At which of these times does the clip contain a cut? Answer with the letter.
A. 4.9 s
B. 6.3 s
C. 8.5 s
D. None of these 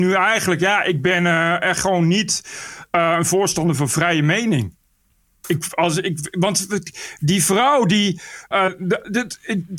C